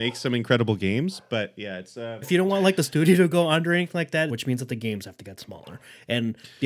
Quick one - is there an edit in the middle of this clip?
yes; 2 cuts; at 2.2 s, 4.3 s

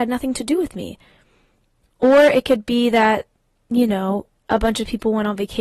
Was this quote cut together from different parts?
no; 0 cuts

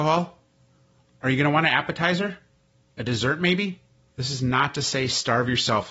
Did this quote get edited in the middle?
yes; 1 cut; at 4.1 s

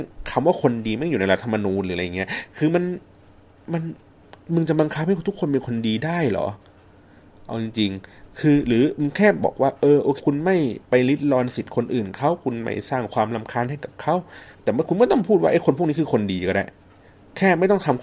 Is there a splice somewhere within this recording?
yes; 2 cuts; at 10.2 s, 14.5 s

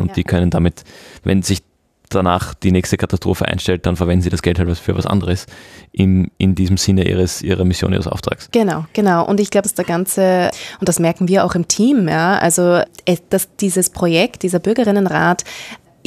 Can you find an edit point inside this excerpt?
yes; 1 cut; at 9.6 s

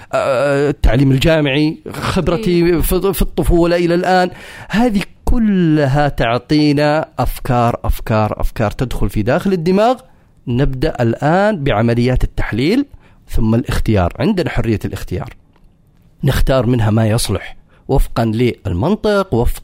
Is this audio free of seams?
yes; 0 cuts

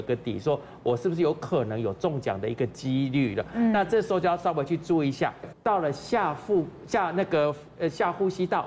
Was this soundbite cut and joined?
yes; 1 cut; at 5.5 s

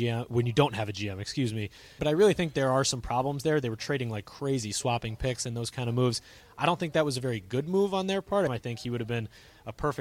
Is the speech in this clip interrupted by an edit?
yes; 2 cuts; at 2.0 s, 8.5 s

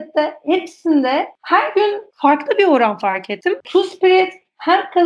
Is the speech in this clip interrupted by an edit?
yes; 1 cut; at 3.6 s

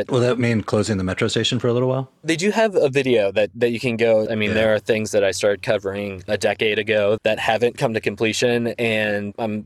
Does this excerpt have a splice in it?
yes; 3 cuts; at 2.2 s, 4.3 s, 7.2 s

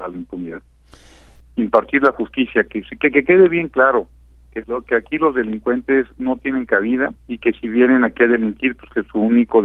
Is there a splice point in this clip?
yes; 2 cuts; at 1.4 s, 7.2 s

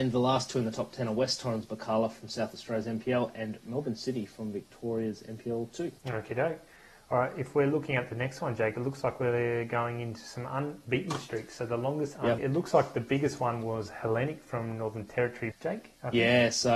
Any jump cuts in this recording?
yes; 3 cuts; at 6.0 s, 12.4 s, 15.5 s

